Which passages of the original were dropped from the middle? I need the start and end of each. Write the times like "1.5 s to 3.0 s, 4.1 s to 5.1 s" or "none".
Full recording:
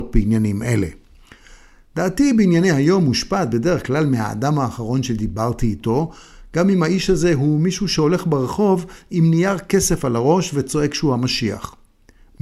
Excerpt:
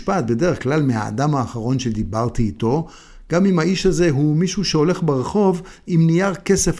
none